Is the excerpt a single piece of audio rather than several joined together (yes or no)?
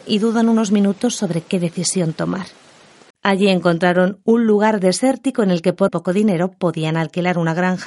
no